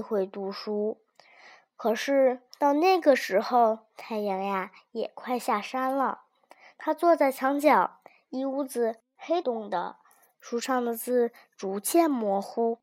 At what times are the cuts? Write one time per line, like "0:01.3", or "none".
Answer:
0:09.4